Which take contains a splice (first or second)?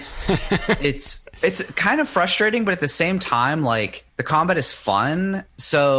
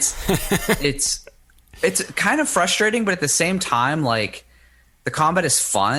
first